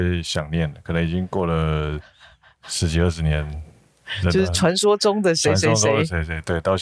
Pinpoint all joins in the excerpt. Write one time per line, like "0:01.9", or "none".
none

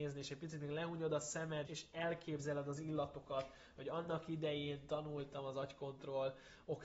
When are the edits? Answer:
0:01.7

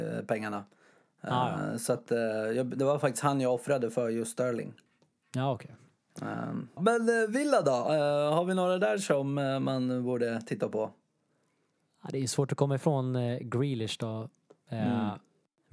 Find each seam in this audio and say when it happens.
0:06.8

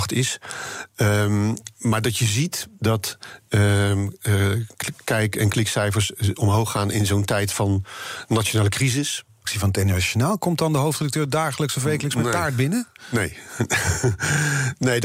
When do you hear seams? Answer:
0:09.4

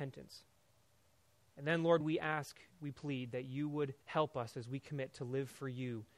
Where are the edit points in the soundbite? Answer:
0:02.0
0:04.0

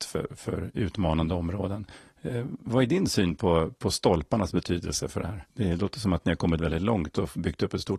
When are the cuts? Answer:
0:05.5
0:06.6

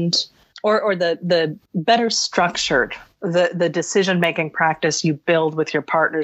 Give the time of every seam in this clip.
0:01.7

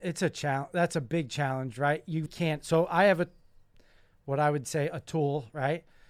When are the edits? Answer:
0:02.3

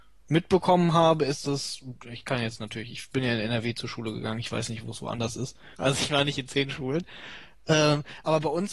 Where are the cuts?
0:05.7

